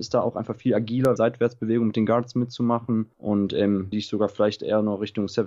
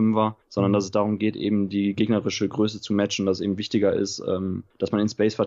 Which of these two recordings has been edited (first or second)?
first